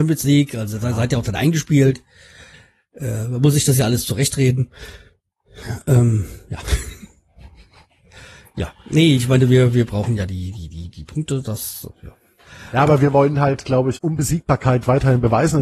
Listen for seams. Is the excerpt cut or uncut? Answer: cut